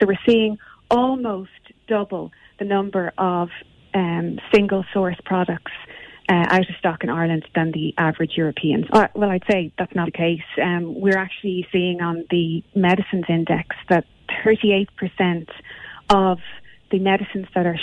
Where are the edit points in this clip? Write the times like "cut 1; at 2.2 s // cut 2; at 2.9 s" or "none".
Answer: cut 1; at 8.9 s // cut 2; at 10.1 s